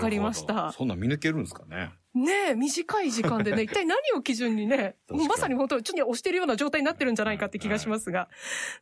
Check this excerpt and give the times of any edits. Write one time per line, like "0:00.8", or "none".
0:05.9